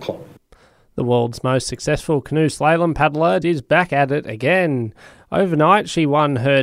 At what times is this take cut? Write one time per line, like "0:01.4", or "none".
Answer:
0:03.4